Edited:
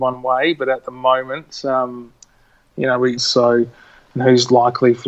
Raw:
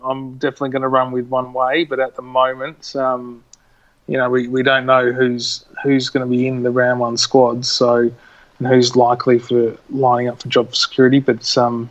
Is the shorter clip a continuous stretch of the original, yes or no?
no